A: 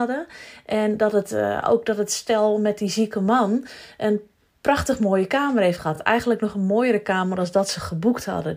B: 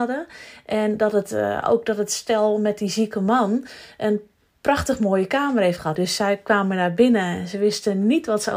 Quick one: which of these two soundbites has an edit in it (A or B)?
B